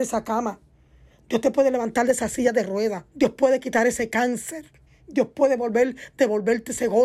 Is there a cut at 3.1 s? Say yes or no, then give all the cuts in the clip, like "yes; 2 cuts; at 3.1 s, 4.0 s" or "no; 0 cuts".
yes; 2 cuts; at 3.1 s, 4.9 s